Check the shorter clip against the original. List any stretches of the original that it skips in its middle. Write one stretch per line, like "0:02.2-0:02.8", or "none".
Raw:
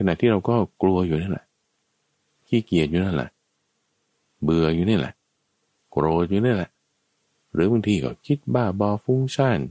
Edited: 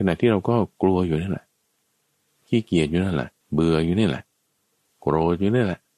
0:03.4-0:04.3